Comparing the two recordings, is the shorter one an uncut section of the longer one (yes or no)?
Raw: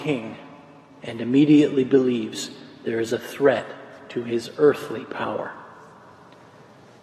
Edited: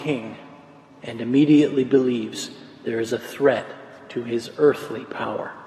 yes